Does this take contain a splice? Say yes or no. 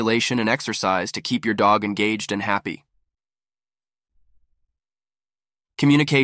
no